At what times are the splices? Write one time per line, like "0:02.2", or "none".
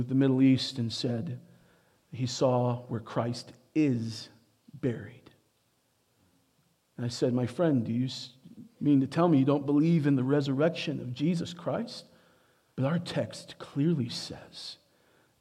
0:12.7